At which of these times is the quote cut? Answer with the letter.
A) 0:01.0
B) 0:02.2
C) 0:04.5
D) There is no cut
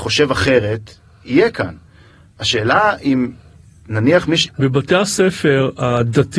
C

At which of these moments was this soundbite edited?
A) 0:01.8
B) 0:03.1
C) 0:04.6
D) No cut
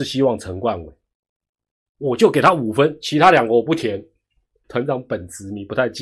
C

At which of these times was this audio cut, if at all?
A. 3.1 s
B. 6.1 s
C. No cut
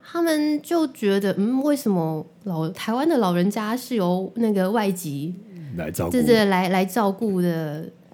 C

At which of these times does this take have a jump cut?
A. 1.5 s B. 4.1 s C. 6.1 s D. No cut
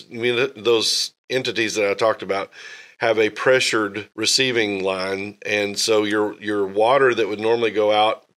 B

